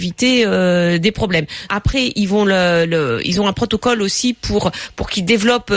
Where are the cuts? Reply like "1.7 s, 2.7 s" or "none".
1.7 s